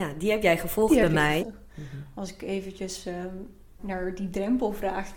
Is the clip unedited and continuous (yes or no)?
no